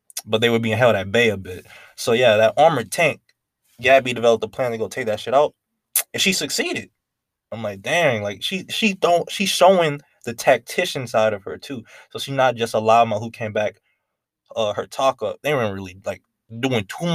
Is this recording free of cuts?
no; 1 cut; at 15.4 s

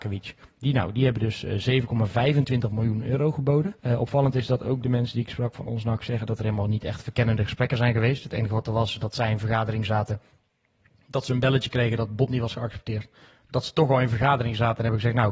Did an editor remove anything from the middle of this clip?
yes; 1 cut; at 3.8 s

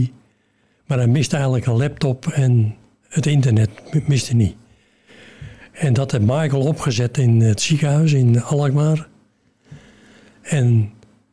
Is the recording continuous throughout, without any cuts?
yes; 0 cuts

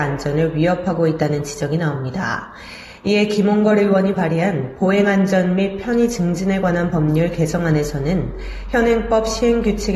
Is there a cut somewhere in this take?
no; 0 cuts

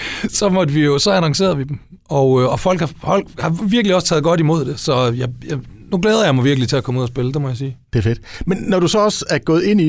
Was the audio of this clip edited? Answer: no; 0 cuts

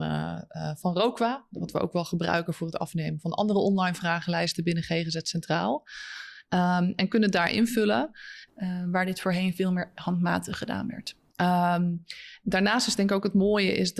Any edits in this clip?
yes; 3 cuts; at 8.5 s, 11.3 s, 12.4 s

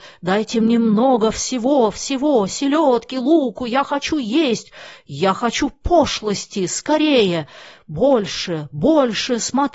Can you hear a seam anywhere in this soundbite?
no; 0 cuts

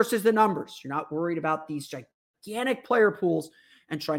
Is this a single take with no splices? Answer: yes; 0 cuts

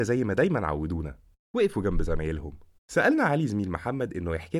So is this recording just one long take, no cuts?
no; 1 cut; at 2.8 s

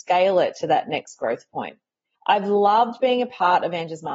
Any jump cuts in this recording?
yes; 1 cut; at 2.1 s

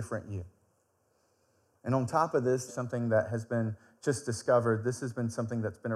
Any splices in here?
yes; 1 cut; at 2.7 s

